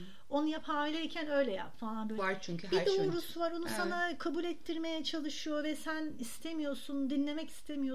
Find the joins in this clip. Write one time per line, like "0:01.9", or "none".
0:02.2